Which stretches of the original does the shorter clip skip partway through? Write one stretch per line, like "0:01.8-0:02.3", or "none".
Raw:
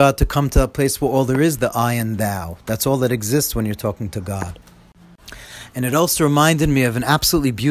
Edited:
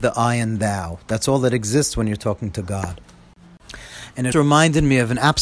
0:05.9-0:06.2